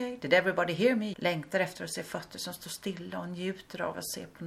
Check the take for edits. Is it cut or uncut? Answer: cut